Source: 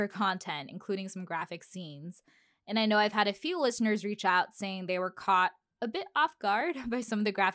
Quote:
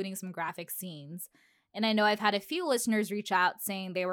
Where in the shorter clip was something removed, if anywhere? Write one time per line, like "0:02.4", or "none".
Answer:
none